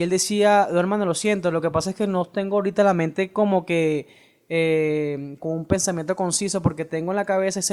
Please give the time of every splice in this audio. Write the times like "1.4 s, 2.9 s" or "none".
5.4 s

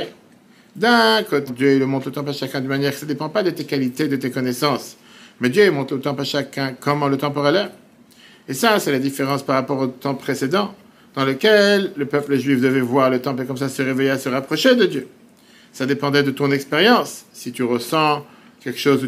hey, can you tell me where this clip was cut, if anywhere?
1.5 s

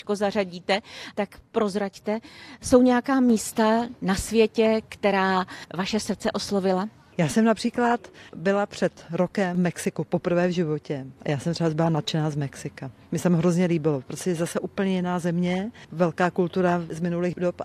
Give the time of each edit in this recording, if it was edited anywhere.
1.1 s

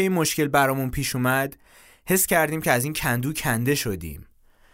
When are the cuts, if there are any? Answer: none

